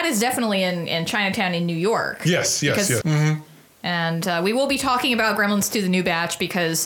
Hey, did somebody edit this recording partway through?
yes; 1 cut; at 3.0 s

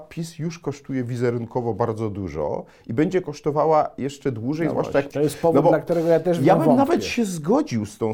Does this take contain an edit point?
yes; 1 cut; at 5.1 s

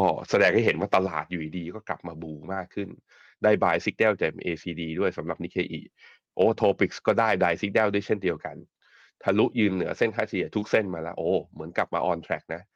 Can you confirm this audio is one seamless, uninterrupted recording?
yes; 0 cuts

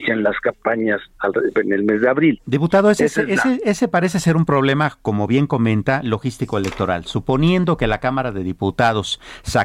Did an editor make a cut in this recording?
no; 0 cuts

